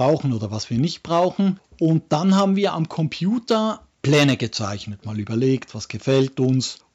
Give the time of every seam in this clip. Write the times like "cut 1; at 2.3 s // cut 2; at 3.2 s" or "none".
cut 1; at 5.0 s